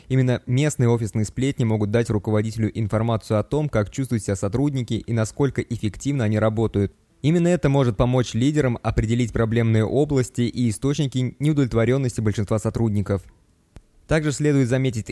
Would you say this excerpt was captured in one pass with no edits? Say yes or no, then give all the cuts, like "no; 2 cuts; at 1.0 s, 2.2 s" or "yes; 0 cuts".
yes; 0 cuts